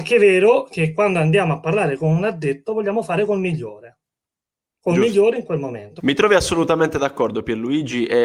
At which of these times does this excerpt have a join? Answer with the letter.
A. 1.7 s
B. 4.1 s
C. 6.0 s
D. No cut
C